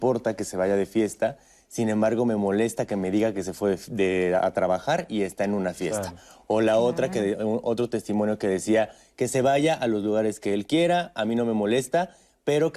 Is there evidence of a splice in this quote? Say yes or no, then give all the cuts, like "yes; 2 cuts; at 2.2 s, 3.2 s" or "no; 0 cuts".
no; 0 cuts